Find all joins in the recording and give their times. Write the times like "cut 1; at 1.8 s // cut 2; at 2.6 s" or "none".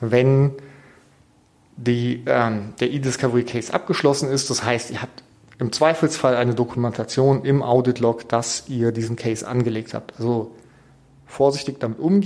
none